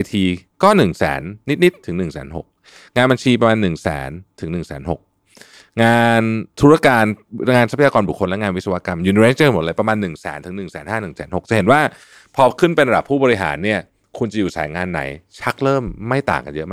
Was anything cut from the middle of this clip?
no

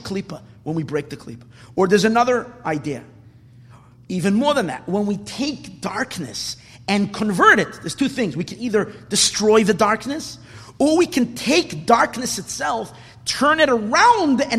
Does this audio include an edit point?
no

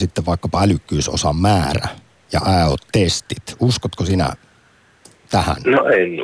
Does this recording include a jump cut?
no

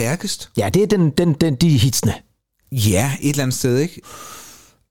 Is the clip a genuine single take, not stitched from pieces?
yes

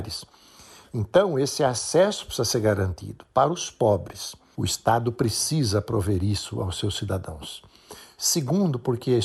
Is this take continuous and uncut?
no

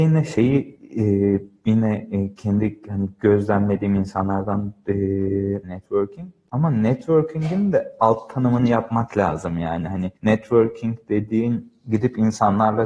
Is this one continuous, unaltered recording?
no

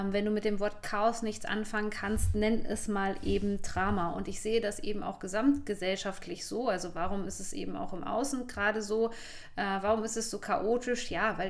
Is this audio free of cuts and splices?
yes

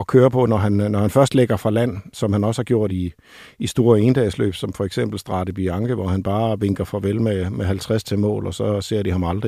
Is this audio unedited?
yes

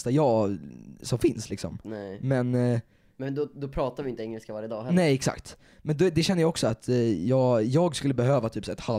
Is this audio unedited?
yes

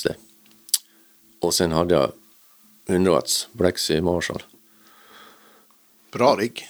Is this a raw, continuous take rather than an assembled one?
yes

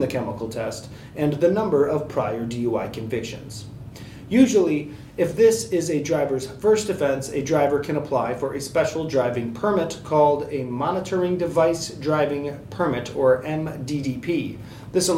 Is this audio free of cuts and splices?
yes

